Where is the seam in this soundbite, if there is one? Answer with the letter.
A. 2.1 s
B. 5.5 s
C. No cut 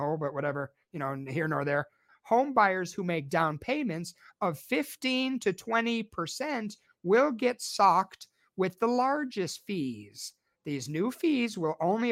A